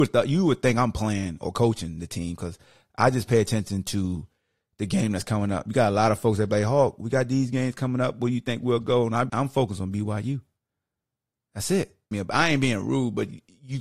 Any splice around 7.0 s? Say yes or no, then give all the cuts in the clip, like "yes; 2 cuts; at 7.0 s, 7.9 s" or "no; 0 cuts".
no; 2 cuts; at 9.3 s, 12.1 s